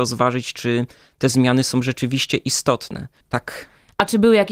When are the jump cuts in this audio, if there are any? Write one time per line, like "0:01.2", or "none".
0:03.2